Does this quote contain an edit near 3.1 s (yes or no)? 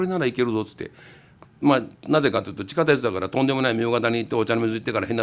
no